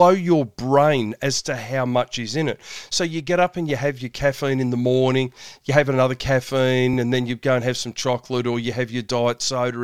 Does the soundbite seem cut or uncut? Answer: uncut